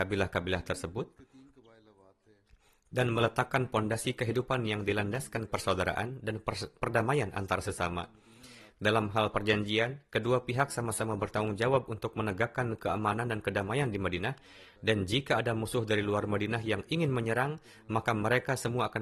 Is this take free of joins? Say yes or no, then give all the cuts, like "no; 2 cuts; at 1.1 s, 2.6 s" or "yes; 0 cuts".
yes; 0 cuts